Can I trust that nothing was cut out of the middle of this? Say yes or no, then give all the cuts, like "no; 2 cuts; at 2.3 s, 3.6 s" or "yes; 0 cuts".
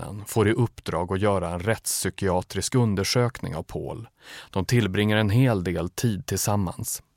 yes; 0 cuts